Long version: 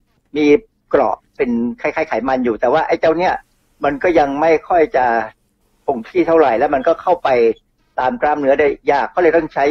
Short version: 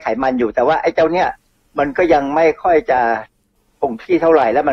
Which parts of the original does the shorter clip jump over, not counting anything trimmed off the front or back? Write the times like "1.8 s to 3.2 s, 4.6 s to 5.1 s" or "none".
none